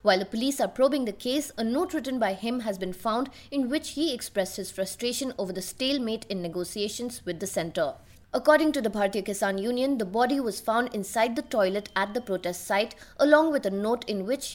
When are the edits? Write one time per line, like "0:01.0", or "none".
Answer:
none